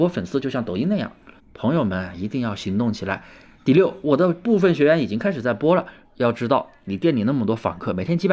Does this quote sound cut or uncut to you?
cut